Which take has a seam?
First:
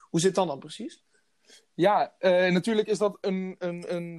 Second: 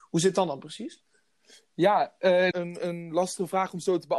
second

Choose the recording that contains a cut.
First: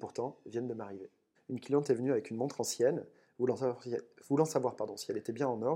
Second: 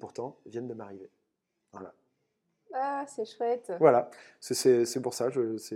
first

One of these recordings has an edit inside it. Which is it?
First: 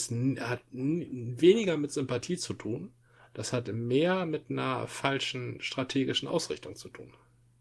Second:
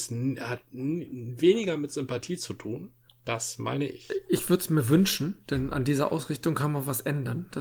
second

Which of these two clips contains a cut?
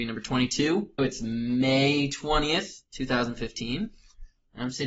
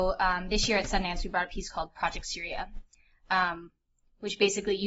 first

